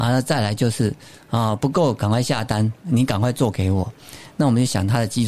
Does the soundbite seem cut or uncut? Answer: uncut